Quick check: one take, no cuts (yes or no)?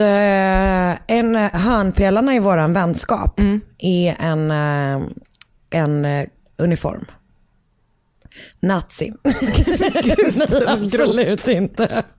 no